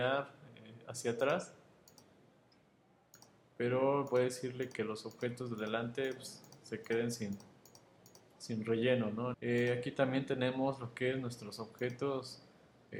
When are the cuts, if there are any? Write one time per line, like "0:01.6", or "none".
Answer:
0:09.3

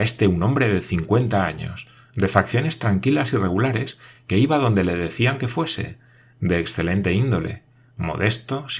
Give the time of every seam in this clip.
none

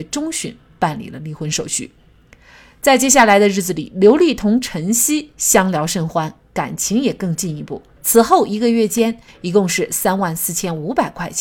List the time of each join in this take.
0:08.0
0:09.3

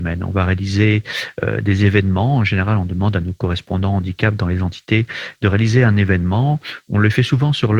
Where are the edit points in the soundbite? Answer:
none

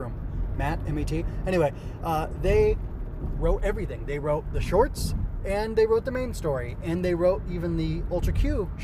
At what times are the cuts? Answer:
none

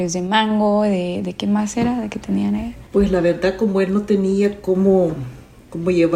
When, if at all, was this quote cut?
none

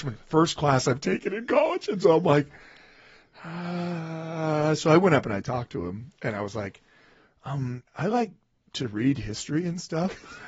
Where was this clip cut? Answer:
0:07.9

